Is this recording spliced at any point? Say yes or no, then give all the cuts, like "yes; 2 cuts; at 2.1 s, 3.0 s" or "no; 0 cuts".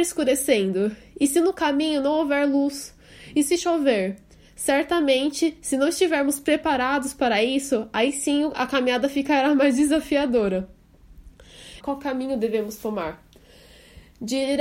yes; 1 cut; at 11.8 s